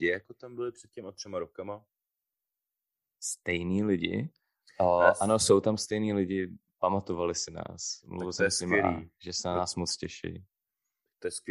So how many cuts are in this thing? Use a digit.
0